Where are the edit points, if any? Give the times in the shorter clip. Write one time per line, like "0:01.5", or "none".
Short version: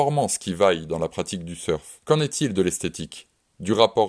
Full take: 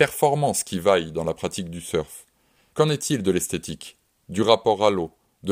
0:02.0

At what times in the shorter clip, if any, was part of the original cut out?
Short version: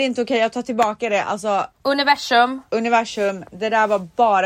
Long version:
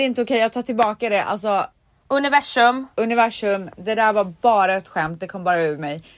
0:01.7

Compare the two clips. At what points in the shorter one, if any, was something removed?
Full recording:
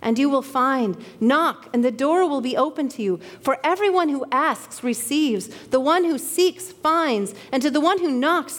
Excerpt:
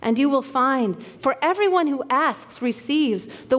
0:01.2

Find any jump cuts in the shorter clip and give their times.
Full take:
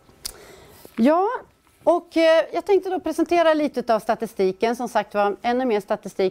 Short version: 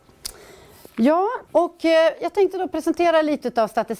0:01.5

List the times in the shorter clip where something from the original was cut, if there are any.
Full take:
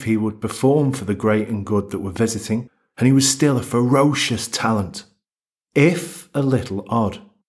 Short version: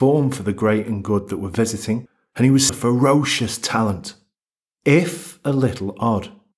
0:02.7

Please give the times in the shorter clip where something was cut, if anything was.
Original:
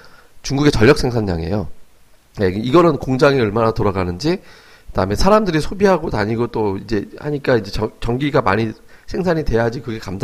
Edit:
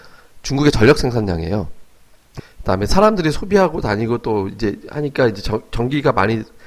0:02.4

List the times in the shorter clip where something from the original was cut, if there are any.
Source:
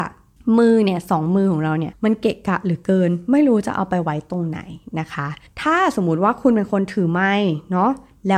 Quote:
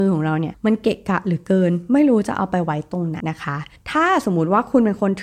0:03.2

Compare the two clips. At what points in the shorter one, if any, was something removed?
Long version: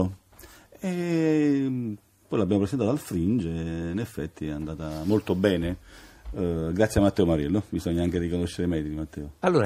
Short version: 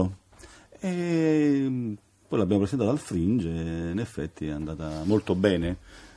none

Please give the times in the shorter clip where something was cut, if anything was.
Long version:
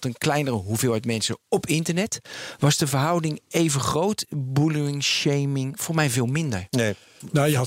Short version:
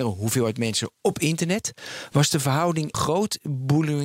0:02.9

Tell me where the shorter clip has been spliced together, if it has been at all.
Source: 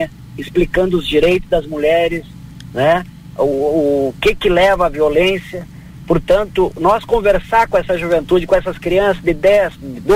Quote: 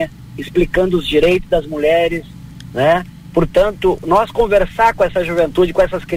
0:03.3

